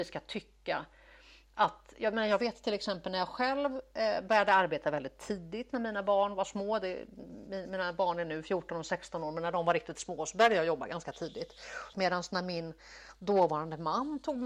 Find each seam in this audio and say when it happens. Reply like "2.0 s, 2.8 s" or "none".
11.9 s